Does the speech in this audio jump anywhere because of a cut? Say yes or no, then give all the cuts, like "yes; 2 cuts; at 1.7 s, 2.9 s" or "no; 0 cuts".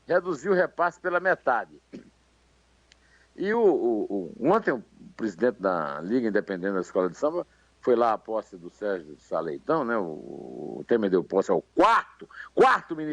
no; 0 cuts